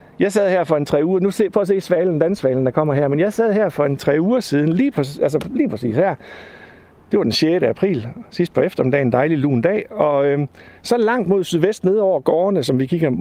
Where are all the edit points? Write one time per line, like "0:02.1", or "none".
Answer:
none